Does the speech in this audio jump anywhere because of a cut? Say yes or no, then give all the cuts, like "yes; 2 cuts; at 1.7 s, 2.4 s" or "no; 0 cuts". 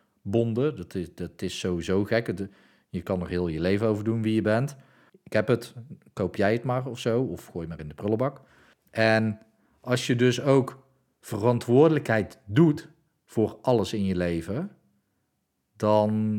yes; 2 cuts; at 5.1 s, 8.7 s